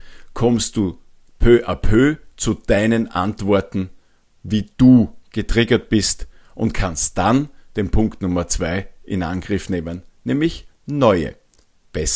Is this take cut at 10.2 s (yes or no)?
no